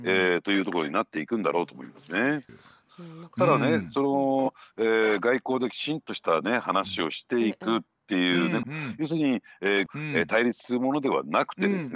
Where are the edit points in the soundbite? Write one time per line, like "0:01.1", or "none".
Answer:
0:02.5
0:08.6
0:09.9